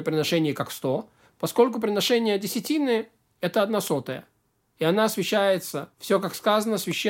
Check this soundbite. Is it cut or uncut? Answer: cut